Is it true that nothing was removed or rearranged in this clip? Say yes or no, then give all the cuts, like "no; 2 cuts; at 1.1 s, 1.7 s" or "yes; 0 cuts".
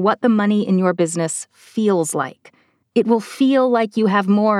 no; 1 cut; at 2.8 s